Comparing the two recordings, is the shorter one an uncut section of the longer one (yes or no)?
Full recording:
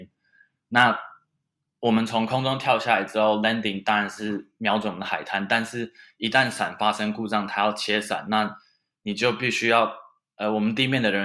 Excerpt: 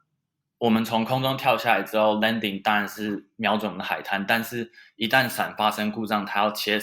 yes